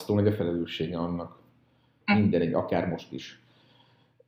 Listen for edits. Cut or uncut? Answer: cut